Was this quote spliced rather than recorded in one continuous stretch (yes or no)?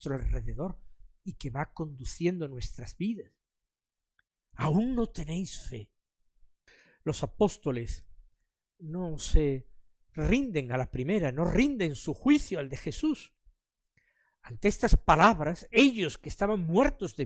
no